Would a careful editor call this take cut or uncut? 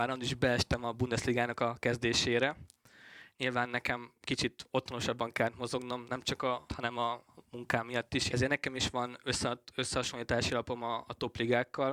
cut